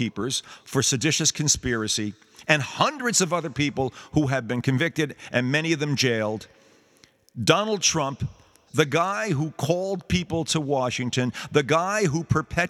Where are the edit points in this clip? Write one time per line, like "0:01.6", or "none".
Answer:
0:08.7